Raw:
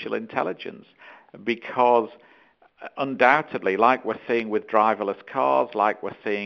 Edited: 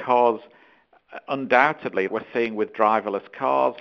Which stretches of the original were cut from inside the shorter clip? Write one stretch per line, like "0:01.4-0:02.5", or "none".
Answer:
0:03.8-0:04.0